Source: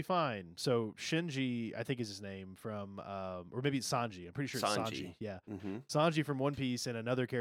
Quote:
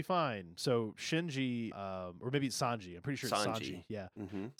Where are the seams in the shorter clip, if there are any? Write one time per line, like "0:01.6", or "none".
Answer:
0:01.7